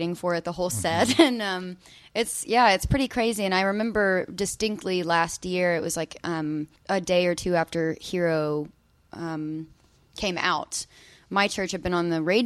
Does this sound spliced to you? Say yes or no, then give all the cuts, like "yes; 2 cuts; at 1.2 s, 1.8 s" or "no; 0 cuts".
yes; 1 cut; at 6.8 s